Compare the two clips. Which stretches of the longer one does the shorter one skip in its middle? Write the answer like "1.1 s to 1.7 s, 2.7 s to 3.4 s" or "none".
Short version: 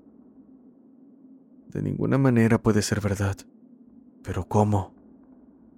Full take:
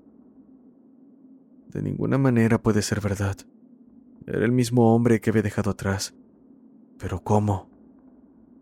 4.1 s to 6.8 s

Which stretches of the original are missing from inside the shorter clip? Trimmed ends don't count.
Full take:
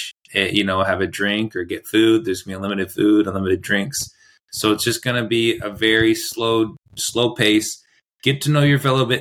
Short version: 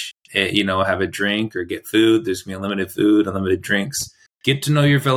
4.3 s to 8.0 s

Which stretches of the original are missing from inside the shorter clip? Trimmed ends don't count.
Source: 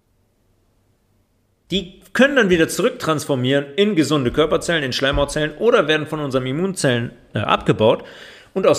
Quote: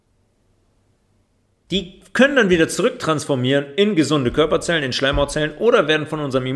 none

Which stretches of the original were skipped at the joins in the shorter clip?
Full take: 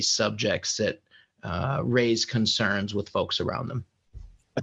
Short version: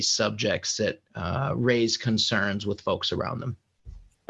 1.1 s to 1.3 s

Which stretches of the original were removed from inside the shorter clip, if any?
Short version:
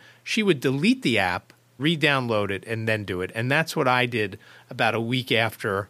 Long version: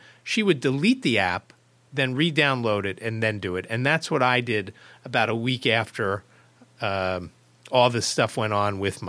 1.8 s to 2.1 s

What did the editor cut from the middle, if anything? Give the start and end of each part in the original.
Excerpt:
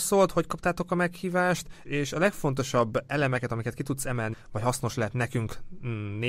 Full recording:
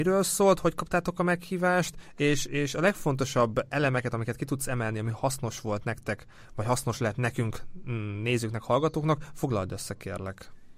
2.1 s to 2.5 s, 4.9 s to 6.4 s

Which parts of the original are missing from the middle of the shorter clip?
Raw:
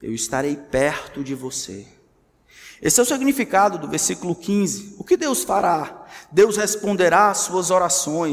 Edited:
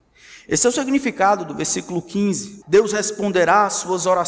5.0 s to 6.3 s

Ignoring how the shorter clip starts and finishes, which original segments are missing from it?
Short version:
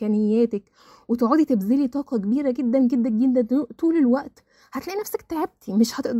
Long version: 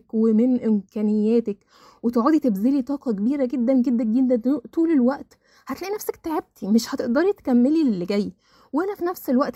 none

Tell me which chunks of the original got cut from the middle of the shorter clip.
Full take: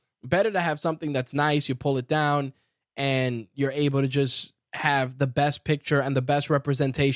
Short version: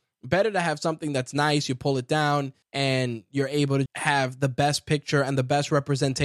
2.6 s to 2.9 s, 4.1 s to 4.6 s

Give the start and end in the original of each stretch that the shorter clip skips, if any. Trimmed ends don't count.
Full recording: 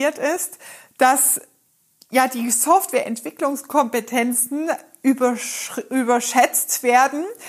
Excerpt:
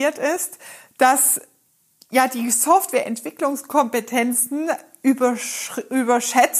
none

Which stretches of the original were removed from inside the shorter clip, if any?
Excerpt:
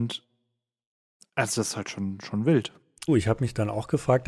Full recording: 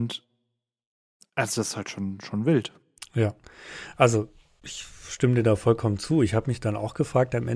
3.1 s to 6.1 s

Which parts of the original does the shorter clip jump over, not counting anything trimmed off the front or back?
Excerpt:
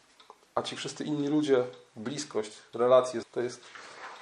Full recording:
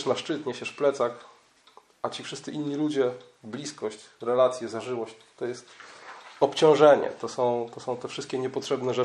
4.7 s to 5.3 s

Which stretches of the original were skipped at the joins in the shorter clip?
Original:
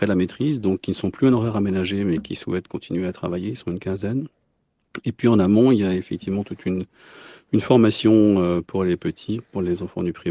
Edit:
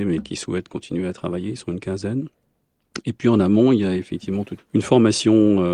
6.6 s to 7.4 s

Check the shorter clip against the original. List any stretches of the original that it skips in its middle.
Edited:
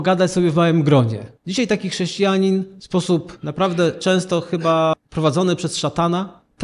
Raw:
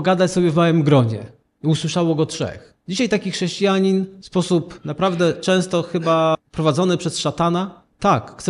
1.4 s to 2.8 s

